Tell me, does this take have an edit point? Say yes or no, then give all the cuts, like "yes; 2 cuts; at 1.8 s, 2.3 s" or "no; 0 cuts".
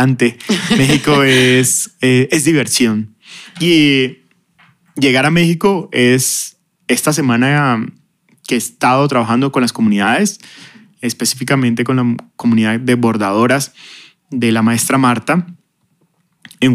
no; 0 cuts